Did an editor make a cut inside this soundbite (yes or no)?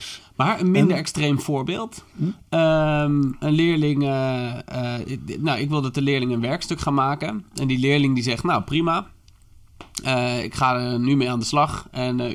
no